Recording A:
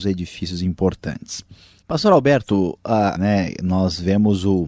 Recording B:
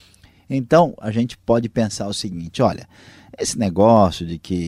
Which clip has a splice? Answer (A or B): A